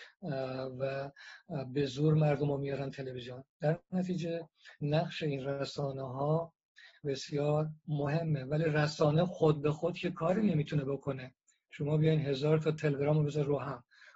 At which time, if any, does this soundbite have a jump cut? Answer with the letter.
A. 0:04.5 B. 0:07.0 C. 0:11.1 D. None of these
B